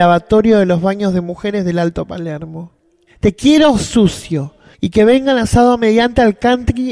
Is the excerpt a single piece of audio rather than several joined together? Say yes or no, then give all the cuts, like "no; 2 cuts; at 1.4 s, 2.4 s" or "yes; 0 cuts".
no; 1 cut; at 4.7 s